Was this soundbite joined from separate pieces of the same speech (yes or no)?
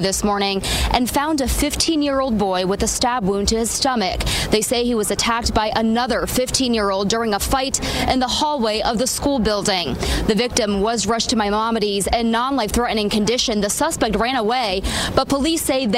no